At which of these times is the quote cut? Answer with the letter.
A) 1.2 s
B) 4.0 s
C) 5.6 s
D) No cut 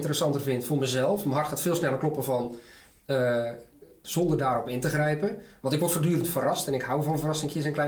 B